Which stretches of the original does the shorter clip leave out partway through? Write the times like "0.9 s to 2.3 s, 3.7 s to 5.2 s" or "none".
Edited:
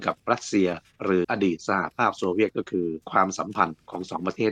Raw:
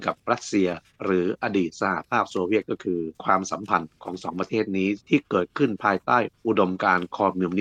1.2 s to 1.4 s